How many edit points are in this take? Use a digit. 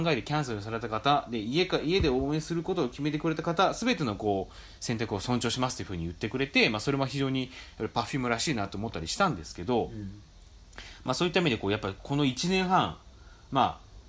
0